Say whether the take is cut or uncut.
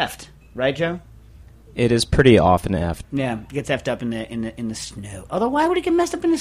cut